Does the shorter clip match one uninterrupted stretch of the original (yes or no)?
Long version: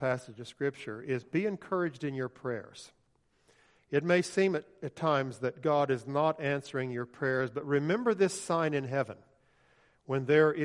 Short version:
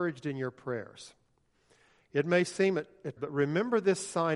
no